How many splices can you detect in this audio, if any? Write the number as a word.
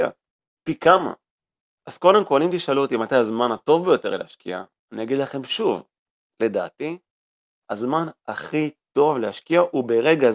zero